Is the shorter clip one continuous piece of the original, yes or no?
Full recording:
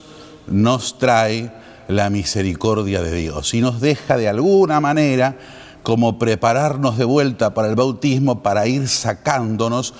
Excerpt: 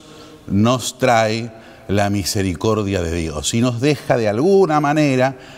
yes